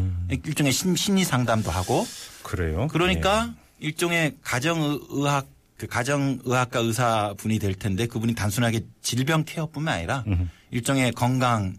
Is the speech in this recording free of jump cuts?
yes; 0 cuts

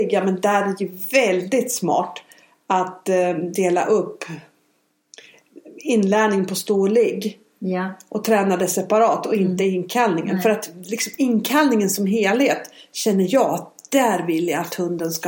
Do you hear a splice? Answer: no; 0 cuts

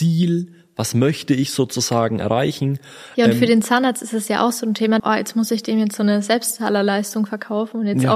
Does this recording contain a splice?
yes; 2 cuts; at 3.1 s, 5.0 s

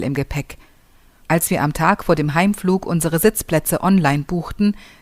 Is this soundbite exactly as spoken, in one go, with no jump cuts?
no; 1 cut; at 1.2 s

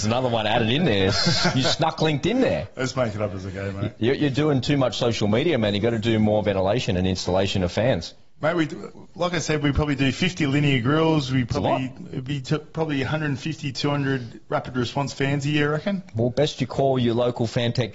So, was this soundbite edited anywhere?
no; 0 cuts

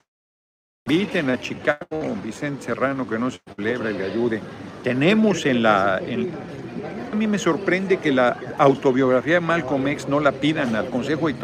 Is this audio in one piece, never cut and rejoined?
no; 2 cuts; at 4.8 s, 7.1 s

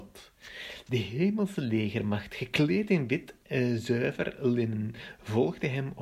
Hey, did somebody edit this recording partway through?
no; 0 cuts

